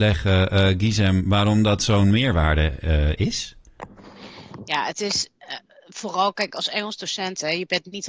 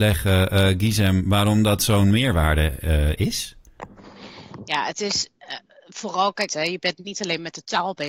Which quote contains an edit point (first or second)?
second